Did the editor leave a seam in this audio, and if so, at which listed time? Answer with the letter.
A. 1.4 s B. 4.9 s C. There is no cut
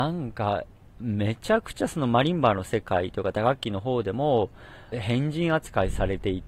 B